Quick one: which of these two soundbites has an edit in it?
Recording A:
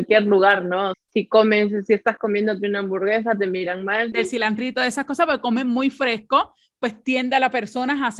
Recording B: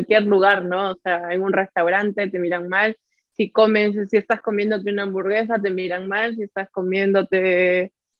A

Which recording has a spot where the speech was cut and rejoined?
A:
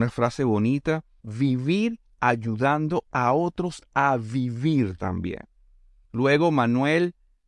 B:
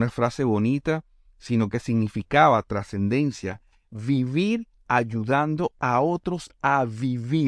A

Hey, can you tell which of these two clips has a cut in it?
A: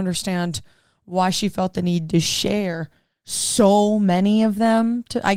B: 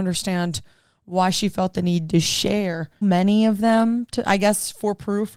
B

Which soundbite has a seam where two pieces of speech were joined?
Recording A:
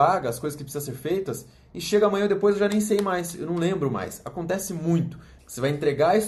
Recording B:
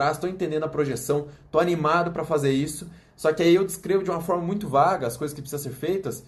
A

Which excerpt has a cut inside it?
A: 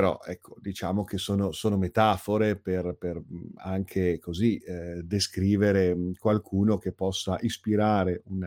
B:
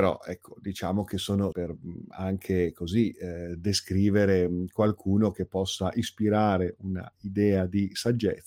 B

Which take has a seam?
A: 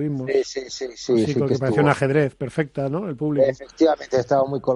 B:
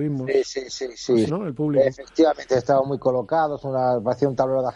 B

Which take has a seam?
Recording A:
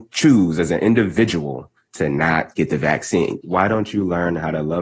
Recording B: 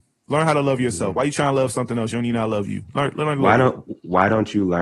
A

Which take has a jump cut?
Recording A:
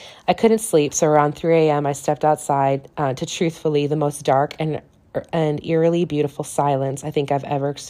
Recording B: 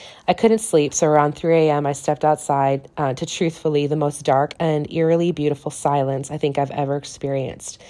B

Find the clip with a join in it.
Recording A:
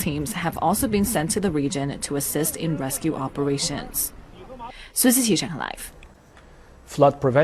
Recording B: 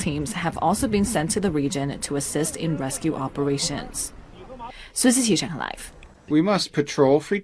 B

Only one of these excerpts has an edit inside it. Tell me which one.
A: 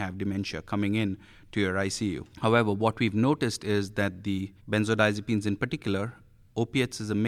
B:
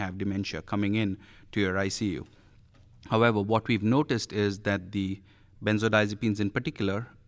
A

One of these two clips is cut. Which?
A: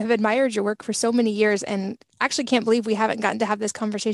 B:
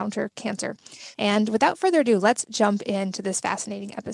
B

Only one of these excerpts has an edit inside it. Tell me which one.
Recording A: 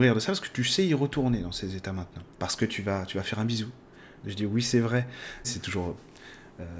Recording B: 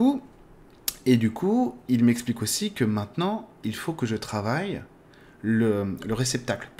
A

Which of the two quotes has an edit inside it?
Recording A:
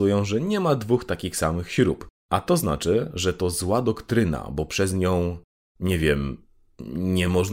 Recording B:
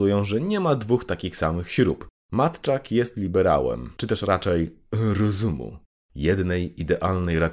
B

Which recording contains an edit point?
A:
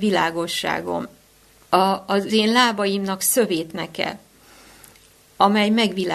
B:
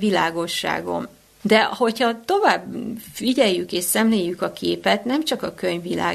B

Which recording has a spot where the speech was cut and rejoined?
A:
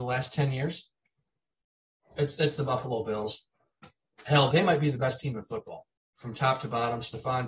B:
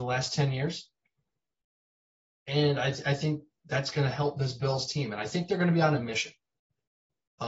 A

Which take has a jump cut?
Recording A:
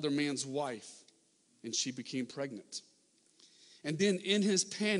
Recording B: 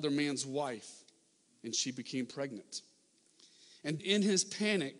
B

